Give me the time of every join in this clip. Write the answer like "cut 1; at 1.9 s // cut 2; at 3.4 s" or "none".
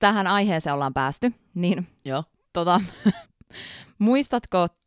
cut 1; at 3.3 s